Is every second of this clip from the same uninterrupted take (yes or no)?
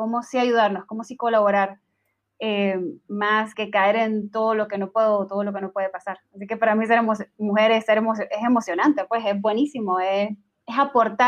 no